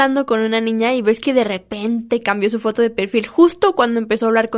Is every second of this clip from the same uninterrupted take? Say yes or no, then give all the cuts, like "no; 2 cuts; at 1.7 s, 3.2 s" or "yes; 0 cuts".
yes; 0 cuts